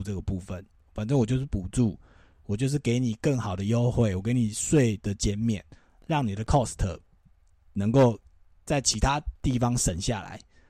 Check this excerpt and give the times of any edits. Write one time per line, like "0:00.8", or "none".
none